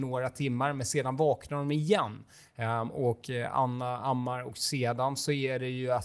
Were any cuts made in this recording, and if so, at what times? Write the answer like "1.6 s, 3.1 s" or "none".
none